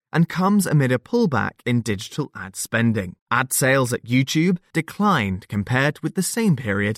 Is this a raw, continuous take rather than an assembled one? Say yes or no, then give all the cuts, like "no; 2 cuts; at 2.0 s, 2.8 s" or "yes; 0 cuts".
no; 2 cuts; at 3.2 s, 4.7 s